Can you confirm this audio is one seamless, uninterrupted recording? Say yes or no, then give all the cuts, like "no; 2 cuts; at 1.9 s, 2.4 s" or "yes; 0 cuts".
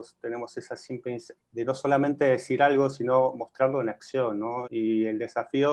no; 2 cuts; at 1.4 s, 4.6 s